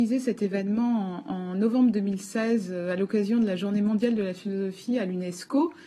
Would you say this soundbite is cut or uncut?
uncut